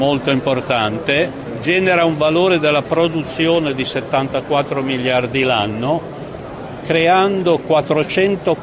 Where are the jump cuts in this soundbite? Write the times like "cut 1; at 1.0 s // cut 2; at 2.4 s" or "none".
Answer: cut 1; at 6.8 s